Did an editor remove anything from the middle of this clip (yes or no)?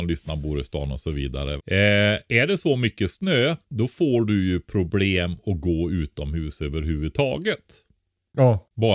yes